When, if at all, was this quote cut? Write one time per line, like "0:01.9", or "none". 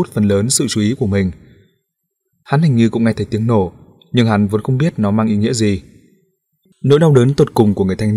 0:06.7